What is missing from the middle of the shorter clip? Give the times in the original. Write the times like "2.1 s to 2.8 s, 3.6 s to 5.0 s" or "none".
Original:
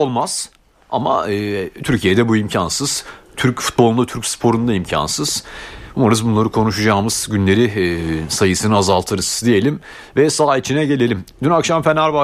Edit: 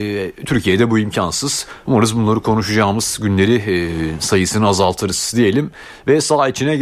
3.2 s to 5.9 s

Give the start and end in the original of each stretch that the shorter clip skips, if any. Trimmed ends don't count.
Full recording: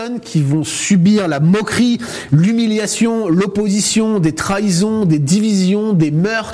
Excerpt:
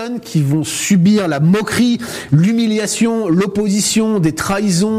none

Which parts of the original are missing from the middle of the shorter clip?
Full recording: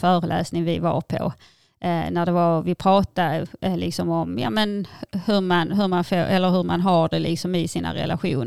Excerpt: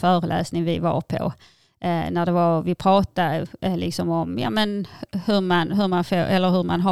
none

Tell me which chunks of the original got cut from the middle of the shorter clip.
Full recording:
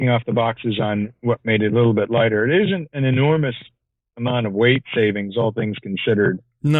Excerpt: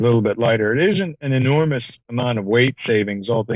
3.7 s to 4.1 s

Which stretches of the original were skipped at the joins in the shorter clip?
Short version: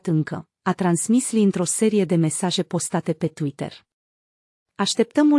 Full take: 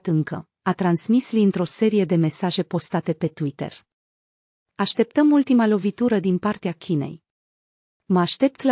none

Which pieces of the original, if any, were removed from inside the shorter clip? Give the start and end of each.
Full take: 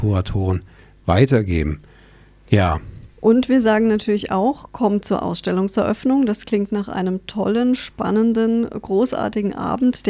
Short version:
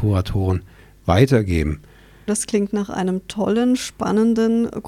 2.3 s to 6.3 s

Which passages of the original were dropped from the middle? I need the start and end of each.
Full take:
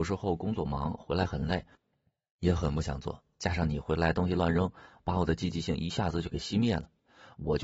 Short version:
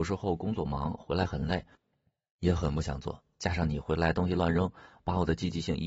none

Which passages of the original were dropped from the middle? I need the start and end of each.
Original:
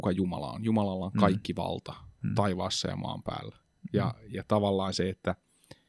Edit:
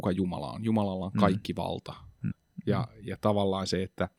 2.3 s to 3.6 s

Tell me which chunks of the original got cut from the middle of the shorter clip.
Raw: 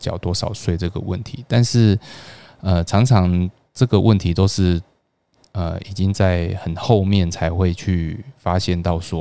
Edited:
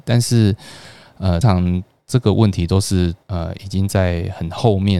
2.8 s to 3.1 s, 4.9 s to 5.5 s

